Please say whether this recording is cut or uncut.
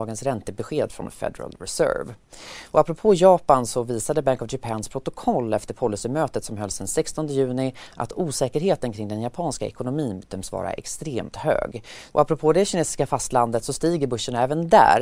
cut